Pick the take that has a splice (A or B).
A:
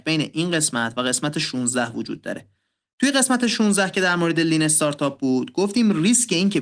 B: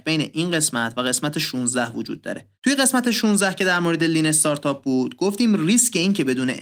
B